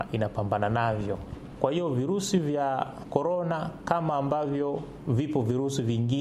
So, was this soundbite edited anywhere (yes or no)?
yes